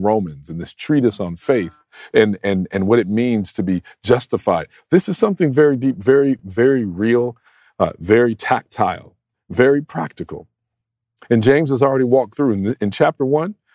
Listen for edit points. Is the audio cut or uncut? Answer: uncut